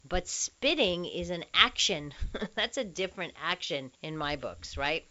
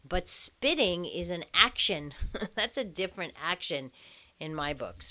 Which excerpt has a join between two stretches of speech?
first; 1 cut; at 3.9 s

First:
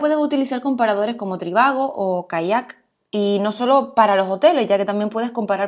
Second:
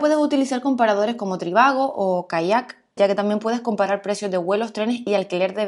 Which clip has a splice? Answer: second; 1 cut; at 3.0 s

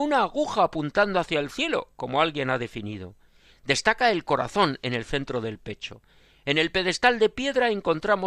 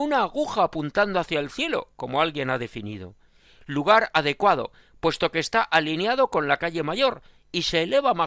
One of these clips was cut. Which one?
first; 1 cut; at 3.5 s

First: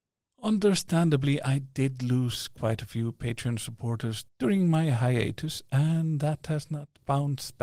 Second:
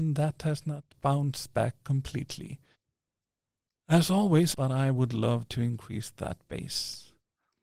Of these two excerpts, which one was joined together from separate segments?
second; 1 cut; at 4.5 s

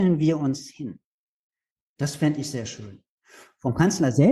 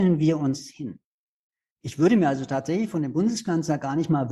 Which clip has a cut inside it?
second; 1 cut; at 1.8 s

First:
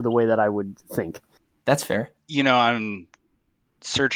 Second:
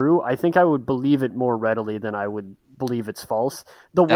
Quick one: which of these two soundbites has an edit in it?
first; 1 cut; at 2.2 s

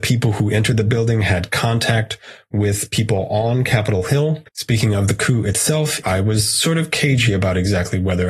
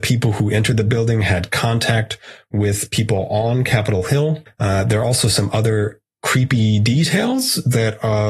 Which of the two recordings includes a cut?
first; 2 cuts; at 4.5 s, 6.0 s

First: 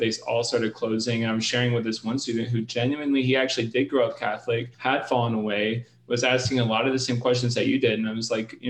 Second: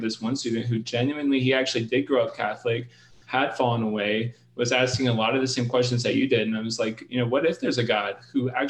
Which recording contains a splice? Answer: first; 1 cut; at 4.7 s

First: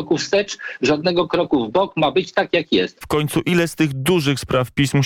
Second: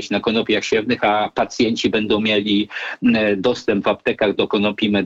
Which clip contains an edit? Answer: first; 1 cut; at 3.0 s

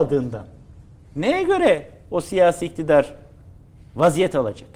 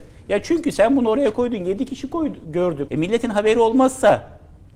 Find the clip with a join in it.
second; 1 cut; at 2.9 s

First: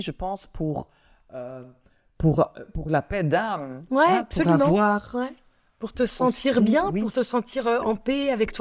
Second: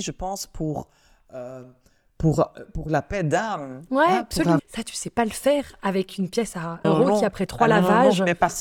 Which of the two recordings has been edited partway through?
second; 2 cuts; at 4.6 s, 6.8 s

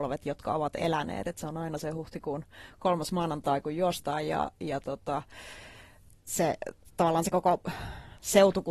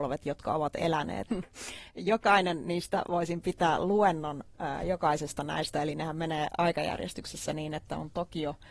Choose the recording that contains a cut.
second; 1 cut; at 1.3 s

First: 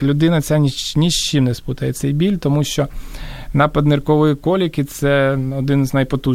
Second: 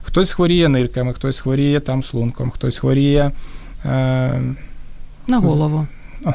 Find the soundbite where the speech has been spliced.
second; 1 cut; at 5.3 s

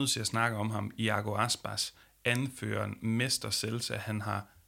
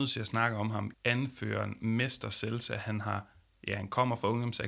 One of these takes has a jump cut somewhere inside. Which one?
second; 1 cut; at 0.9 s

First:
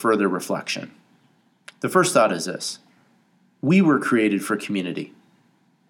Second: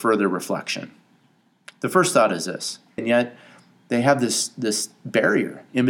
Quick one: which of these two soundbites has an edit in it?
second; 1 cut; at 3.0 s

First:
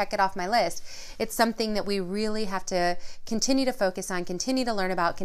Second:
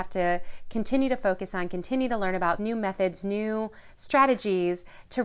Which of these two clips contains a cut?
second; 1 cut; at 2.6 s

